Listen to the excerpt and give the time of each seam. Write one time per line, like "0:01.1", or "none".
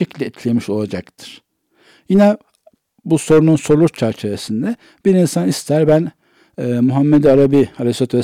none